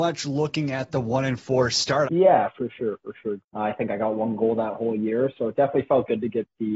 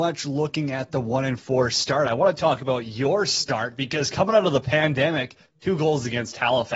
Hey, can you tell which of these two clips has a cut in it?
first; 2 cuts; at 2.1 s, 3.4 s

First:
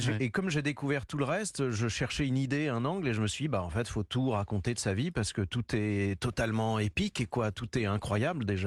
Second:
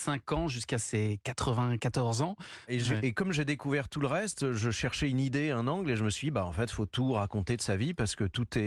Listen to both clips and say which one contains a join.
second; 1 cut; at 2.7 s

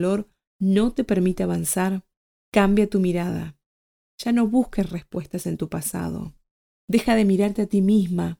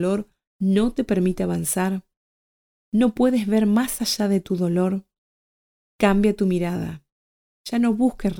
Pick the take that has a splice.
first; 1 cut; at 2.4 s

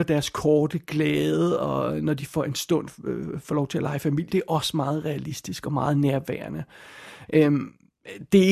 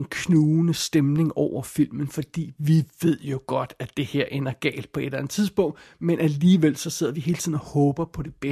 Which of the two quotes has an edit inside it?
first; 2 cuts; at 4.3 s, 7.3 s

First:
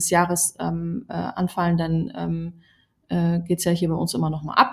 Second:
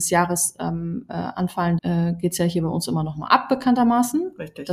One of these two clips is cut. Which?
second; 1 cut; at 1.8 s

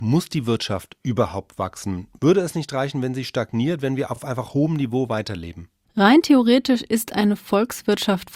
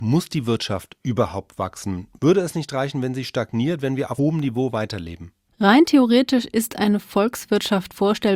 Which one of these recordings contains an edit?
second; 1 cut; at 4.2 s

